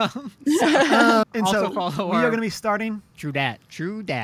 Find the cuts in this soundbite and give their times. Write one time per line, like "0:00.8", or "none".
0:01.2
0:03.1

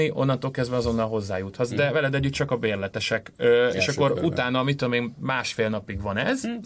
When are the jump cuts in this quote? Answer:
none

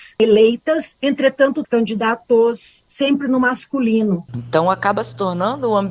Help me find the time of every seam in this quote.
0:01.6
0:04.3

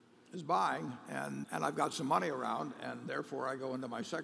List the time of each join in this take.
0:01.4

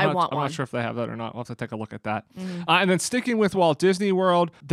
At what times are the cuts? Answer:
none

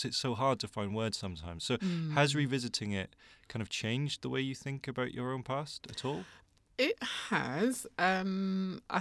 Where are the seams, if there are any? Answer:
none

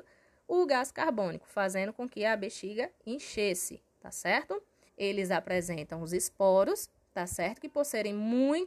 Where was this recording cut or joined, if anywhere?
0:04.9

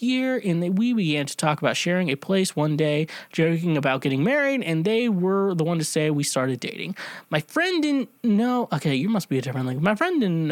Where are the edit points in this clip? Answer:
0:08.2

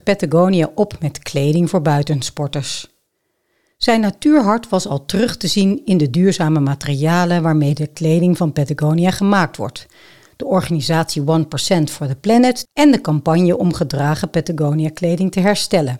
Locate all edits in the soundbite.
0:12.7

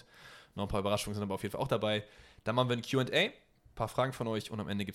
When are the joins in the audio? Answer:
none

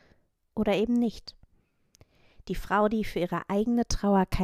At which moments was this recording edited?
none

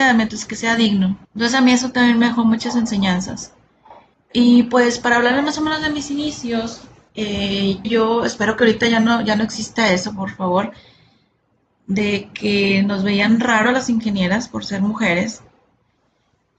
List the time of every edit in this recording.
0:01.2
0:07.8

